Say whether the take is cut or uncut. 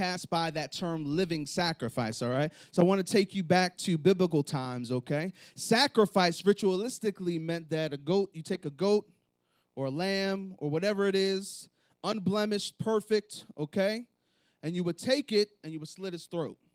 uncut